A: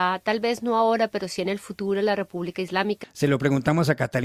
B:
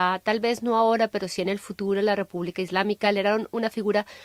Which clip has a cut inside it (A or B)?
A